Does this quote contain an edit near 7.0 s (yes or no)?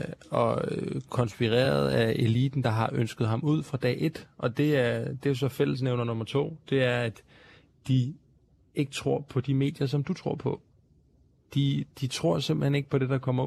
no